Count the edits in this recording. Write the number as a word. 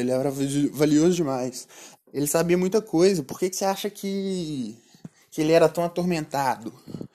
one